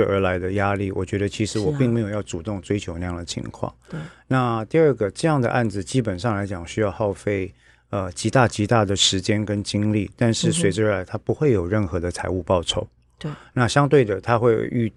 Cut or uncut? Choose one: uncut